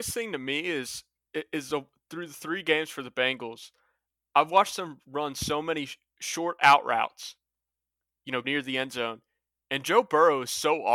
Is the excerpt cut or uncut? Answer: cut